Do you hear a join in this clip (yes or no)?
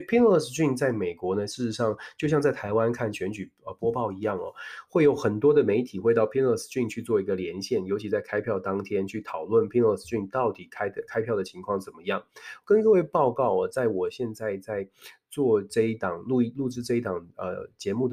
no